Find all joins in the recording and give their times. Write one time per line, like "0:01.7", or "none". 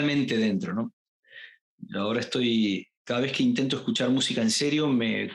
none